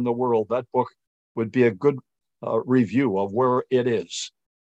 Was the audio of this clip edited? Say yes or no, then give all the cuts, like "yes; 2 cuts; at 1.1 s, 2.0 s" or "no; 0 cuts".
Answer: no; 0 cuts